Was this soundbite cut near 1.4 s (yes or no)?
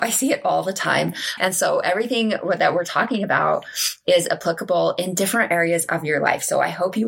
yes